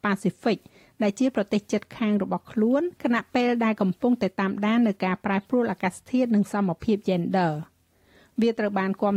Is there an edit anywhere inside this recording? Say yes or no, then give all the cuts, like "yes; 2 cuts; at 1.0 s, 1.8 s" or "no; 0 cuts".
yes; 1 cut; at 3.0 s